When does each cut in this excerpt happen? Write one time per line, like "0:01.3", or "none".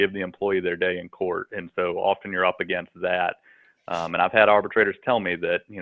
none